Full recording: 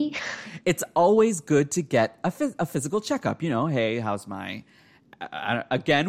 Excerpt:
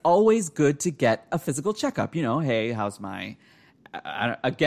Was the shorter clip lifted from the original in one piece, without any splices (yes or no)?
no